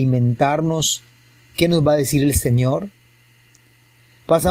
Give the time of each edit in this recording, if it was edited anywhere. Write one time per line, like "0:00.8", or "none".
none